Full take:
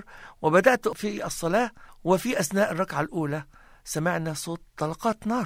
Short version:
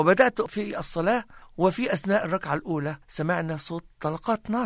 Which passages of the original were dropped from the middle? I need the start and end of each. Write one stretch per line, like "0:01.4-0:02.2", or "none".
0:03.5-0:03.8